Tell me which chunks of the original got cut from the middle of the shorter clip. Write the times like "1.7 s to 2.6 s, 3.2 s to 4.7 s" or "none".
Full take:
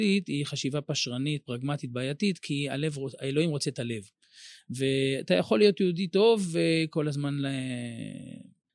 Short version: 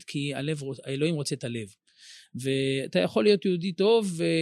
none